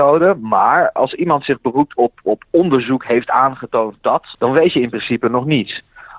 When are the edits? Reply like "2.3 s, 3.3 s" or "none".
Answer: 1.0 s, 2.2 s, 4.3 s